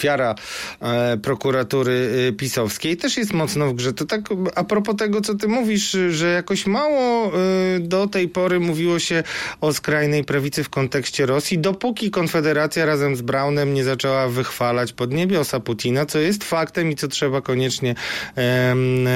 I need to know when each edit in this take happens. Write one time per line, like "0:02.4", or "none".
none